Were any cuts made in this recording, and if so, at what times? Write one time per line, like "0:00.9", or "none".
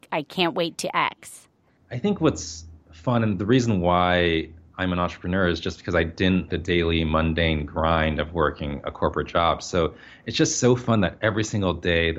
0:06.5